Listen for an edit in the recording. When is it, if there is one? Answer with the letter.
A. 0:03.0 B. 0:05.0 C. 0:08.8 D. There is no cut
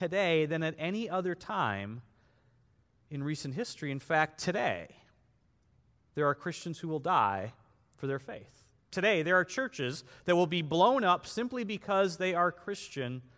D